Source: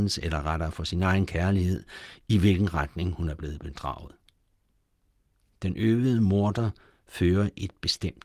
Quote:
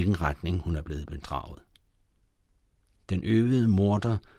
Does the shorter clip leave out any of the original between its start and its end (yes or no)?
no